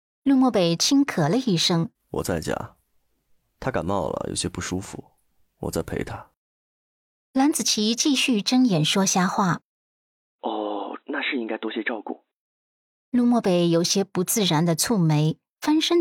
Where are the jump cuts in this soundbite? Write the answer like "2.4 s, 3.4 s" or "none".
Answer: 1.9 s, 11.0 s, 13.0 s